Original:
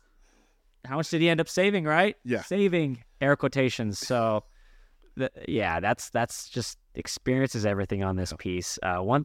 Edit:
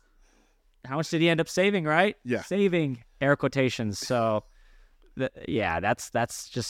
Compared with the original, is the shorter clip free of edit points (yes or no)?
yes